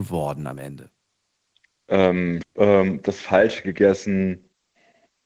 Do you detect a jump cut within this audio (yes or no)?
yes